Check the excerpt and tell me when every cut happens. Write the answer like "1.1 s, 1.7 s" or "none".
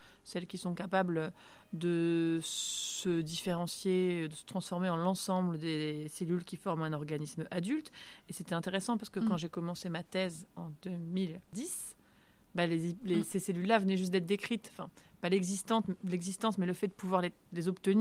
none